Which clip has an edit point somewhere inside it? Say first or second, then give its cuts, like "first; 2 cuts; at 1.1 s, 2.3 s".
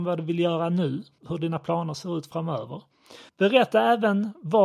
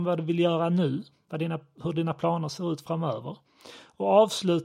first; 2 cuts; at 1.2 s, 3.3 s